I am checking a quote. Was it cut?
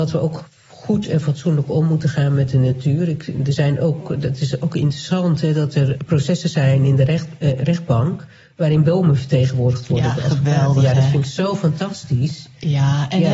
no; 0 cuts

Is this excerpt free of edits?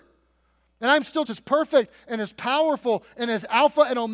no; 1 cut; at 1.2 s

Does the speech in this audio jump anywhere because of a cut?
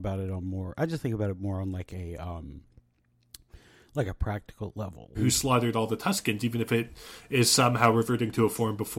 yes; 1 cut; at 5.1 s

